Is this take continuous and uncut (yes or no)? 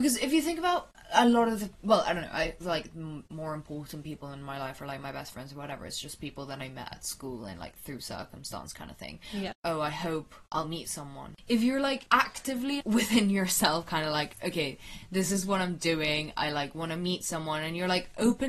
no